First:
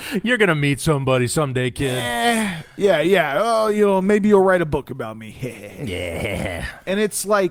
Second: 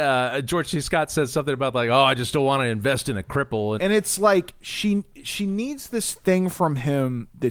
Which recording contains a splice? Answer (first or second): second